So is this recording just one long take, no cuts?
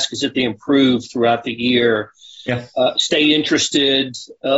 yes; 0 cuts

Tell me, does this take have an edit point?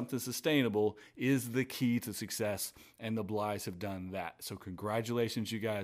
no; 0 cuts

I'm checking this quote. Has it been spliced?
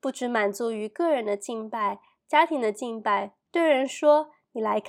yes; 1 cut; at 3.5 s

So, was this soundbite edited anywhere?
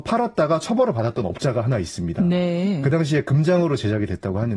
no; 0 cuts

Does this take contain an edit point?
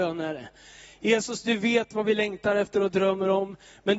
no; 0 cuts

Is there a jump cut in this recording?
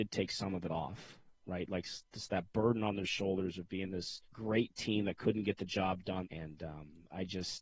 yes; 2 cuts; at 4.2 s, 6.2 s

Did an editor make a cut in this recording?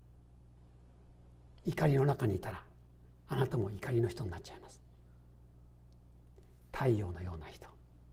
no; 0 cuts

